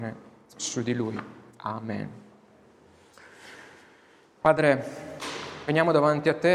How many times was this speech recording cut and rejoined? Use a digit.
2